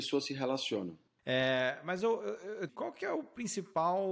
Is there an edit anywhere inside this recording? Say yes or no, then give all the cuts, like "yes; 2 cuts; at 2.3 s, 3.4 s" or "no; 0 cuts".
yes; 2 cuts; at 1.2 s, 2.7 s